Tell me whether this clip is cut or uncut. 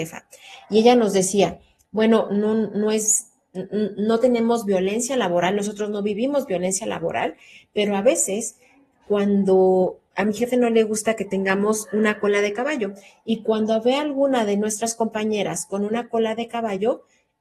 cut